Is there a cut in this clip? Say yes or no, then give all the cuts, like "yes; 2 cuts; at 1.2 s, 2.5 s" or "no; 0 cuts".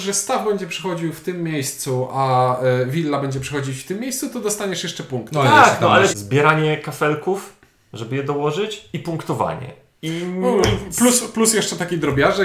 yes; 1 cut; at 6.1 s